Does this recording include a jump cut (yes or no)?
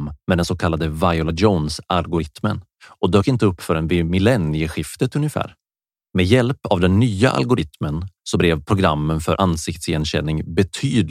yes